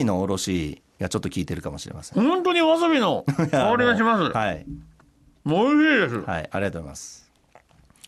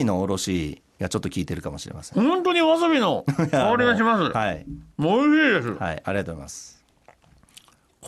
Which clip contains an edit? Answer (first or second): second